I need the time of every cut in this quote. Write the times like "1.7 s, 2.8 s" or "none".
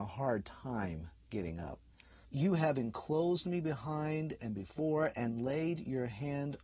2.2 s